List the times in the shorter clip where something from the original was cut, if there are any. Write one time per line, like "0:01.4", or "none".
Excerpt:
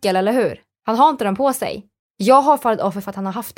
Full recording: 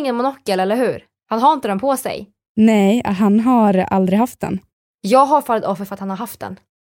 0:02.0